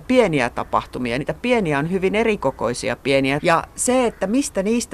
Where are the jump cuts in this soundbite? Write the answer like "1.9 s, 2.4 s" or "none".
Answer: 3.4 s